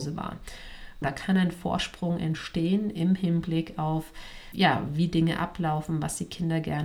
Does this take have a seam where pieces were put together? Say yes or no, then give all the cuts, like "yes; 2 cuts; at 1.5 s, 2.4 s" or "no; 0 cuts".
yes; 2 cuts; at 1.0 s, 4.5 s